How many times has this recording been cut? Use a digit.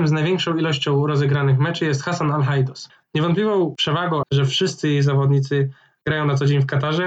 2